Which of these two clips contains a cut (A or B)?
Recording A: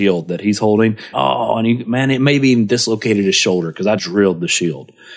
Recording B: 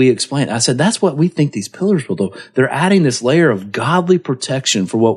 A